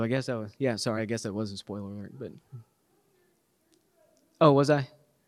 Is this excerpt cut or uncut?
uncut